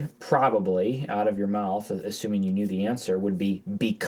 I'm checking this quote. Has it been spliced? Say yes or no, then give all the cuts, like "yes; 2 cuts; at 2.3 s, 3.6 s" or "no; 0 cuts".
no; 0 cuts